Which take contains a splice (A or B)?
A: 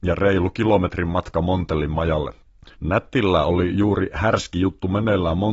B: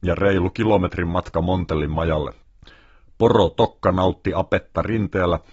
A